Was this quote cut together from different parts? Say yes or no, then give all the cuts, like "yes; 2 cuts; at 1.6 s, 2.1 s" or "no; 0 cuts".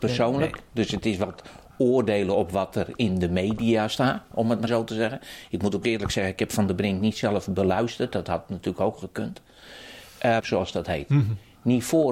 yes; 2 cuts; at 4.7 s, 10.4 s